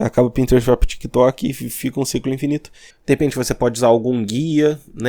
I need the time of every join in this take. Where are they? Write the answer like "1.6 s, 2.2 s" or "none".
2.9 s